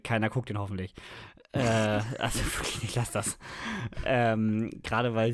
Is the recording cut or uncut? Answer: uncut